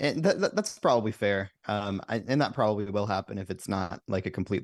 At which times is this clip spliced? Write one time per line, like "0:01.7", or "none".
none